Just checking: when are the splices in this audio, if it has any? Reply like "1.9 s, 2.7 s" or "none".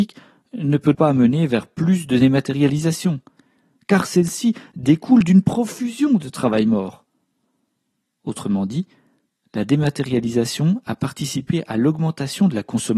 0.9 s

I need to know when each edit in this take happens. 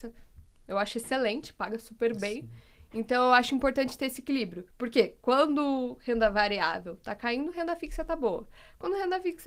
none

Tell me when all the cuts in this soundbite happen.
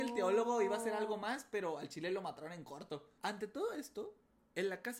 3.2 s

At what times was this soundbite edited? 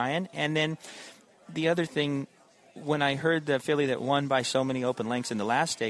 none

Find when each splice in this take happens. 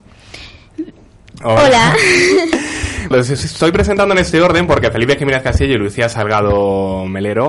1.4 s, 3.1 s

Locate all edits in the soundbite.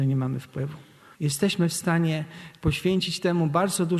1.1 s

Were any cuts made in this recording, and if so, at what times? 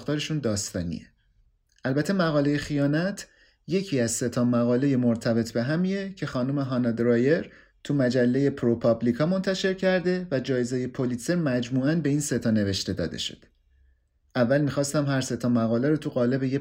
none

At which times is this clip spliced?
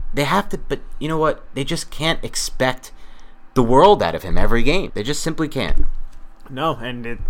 4.9 s

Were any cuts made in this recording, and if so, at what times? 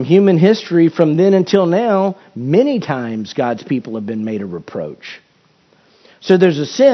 none

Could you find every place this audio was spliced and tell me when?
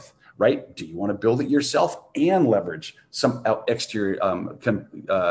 none

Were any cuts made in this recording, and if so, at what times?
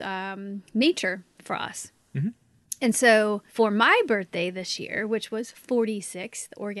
3.5 s

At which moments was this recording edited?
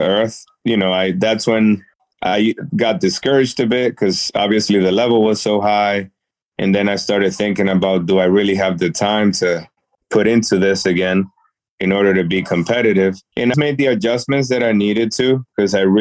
13.5 s

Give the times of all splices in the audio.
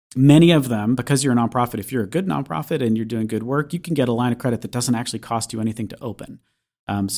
none

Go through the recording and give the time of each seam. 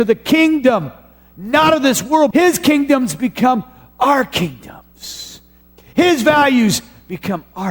2.3 s

